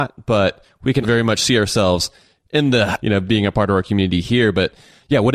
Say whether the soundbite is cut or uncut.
cut